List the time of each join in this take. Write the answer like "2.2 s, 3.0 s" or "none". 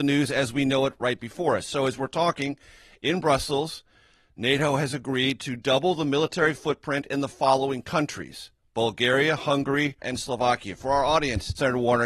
10.0 s